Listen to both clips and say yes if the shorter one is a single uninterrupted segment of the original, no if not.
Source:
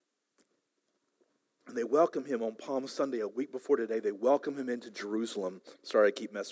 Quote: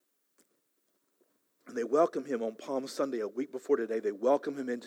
yes